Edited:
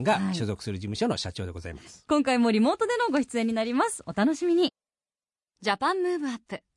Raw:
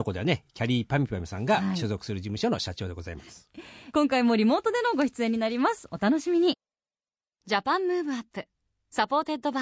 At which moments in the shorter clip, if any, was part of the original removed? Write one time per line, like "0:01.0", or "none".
0:02.1

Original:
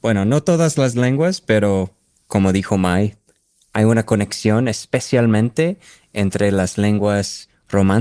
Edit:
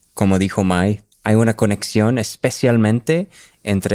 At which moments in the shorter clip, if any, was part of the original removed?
0:01.1

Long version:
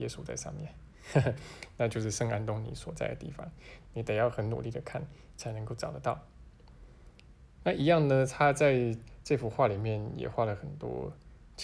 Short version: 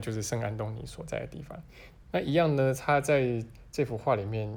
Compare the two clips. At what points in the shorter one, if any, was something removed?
0:02.0

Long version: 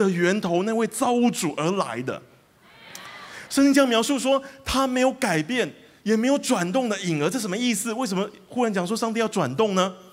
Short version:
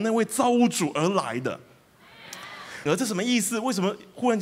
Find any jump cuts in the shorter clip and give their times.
0:02.9

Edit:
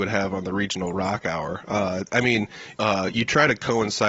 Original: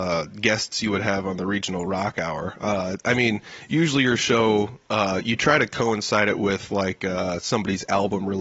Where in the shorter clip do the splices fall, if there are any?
0:02.7

